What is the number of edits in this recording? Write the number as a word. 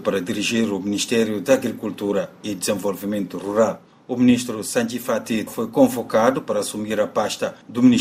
one